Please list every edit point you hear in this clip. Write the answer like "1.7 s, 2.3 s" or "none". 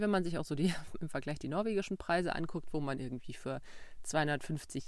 none